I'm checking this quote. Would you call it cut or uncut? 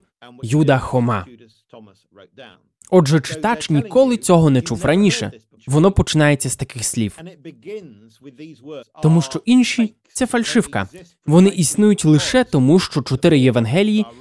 cut